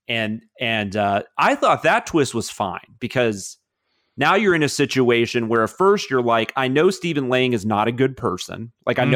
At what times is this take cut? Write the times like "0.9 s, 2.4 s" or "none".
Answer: none